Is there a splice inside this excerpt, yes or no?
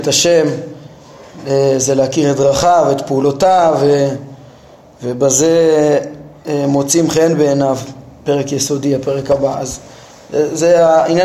no